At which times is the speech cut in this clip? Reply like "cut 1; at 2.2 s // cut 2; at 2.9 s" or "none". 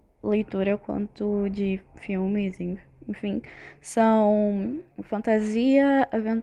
cut 1; at 4.9 s